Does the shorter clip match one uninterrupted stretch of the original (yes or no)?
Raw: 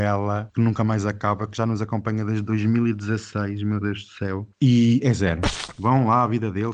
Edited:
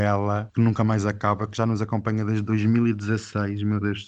yes